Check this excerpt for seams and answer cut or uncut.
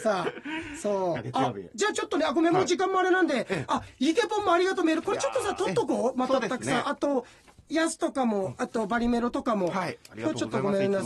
cut